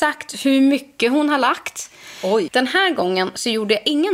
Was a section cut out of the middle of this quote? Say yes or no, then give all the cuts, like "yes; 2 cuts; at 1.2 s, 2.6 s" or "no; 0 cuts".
yes; 1 cut; at 2.5 s